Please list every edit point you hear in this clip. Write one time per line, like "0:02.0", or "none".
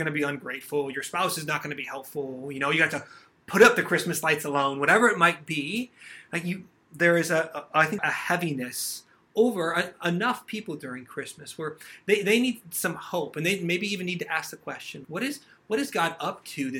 0:08.0
0:15.0